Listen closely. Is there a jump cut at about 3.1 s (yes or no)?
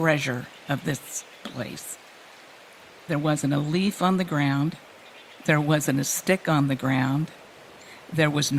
yes